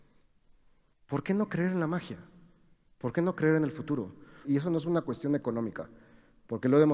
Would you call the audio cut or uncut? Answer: cut